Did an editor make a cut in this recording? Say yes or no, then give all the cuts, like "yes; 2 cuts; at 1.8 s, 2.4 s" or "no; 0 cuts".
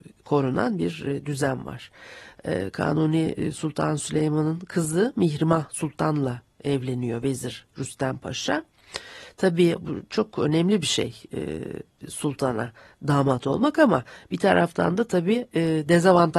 no; 0 cuts